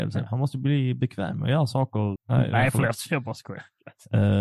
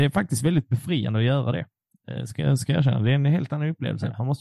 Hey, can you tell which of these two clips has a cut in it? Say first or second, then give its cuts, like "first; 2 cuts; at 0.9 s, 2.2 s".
first; 1 cut; at 2.2 s